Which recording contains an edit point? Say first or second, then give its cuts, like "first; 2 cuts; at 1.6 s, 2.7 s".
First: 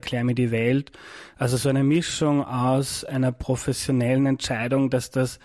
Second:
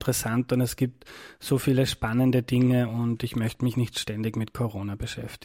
second; 1 cut; at 3.7 s